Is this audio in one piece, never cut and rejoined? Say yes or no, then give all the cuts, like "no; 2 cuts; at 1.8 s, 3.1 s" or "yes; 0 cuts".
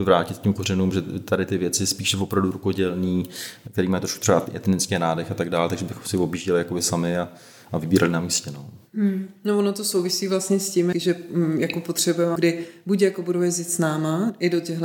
no; 2 cuts; at 10.9 s, 12.4 s